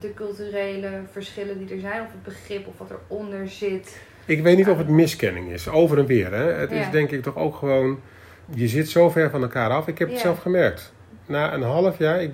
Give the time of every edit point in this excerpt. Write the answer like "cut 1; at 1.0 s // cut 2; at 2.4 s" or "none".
cut 1; at 8.5 s